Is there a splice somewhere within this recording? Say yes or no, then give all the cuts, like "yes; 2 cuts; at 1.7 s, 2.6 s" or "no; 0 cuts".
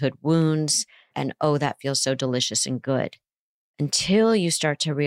yes; 1 cut; at 1.1 s